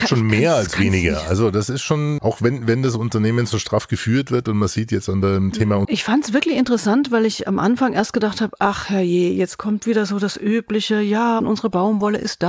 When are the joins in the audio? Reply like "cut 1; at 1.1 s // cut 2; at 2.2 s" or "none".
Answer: cut 1; at 2.2 s // cut 2; at 5.8 s // cut 3; at 11.4 s